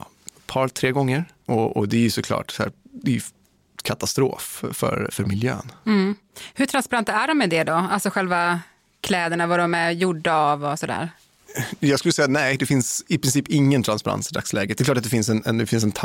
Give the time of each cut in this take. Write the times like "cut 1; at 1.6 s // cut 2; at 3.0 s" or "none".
cut 1; at 5.1 s